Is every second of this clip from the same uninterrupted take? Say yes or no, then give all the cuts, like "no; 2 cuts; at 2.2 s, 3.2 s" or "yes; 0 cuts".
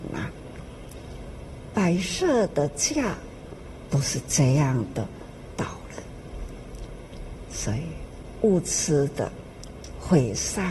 yes; 0 cuts